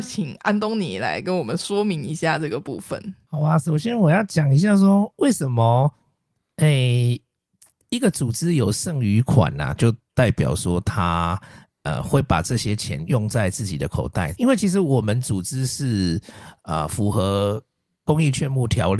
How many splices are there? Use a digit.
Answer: 1